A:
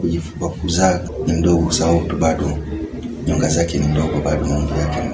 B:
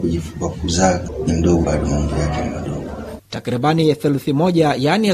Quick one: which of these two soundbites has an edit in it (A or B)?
B